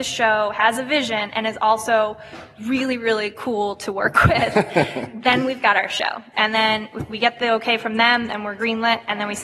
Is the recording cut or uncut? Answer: cut